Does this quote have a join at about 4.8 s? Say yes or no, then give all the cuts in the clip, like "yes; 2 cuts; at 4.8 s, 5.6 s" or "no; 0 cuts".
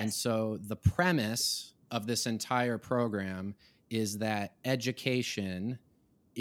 no; 1 cut; at 1.8 s